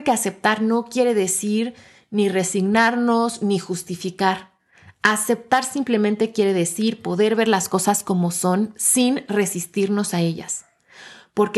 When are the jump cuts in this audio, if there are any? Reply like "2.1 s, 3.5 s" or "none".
none